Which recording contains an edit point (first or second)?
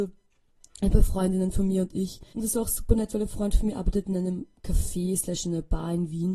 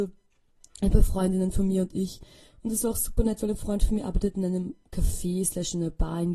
first